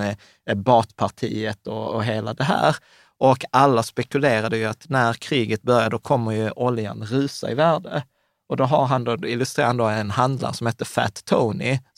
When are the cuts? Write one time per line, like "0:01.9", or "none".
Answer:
none

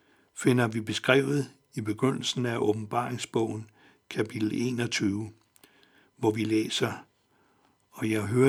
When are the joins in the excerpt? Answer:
none

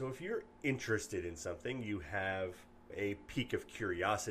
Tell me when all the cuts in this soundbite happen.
0:02.9

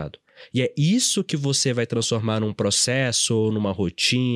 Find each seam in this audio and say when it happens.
none

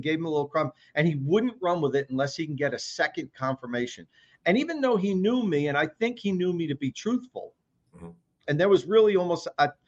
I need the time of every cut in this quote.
0:08.4

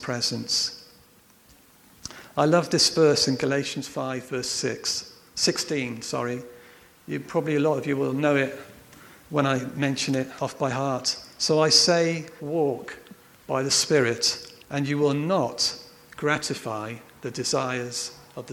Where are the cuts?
0:12.4
0:14.6

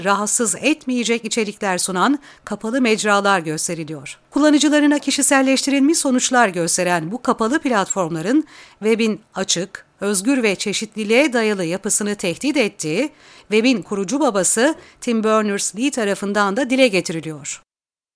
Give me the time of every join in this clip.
0:04.3

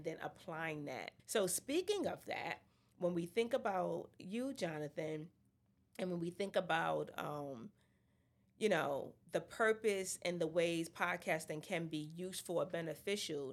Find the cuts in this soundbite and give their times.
0:01.2

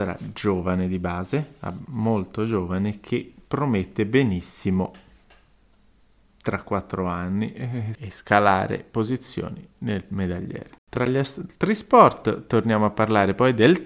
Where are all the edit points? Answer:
0:08.0
0:10.8

